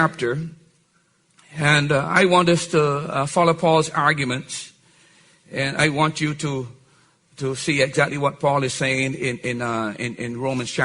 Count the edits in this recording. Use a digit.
0